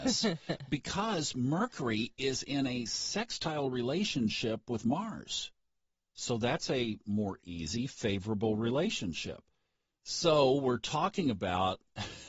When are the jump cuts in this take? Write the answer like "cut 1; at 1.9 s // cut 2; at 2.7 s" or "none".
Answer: none